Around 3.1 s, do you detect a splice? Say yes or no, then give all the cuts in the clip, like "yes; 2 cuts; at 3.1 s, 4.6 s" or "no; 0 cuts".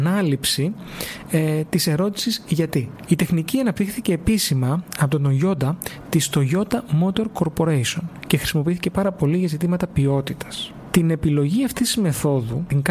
yes; 1 cut; at 3.1 s